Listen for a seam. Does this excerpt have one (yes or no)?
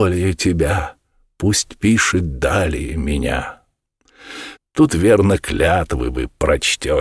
yes